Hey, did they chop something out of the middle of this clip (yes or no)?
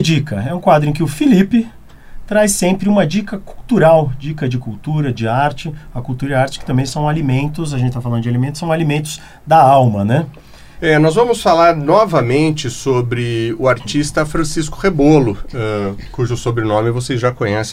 yes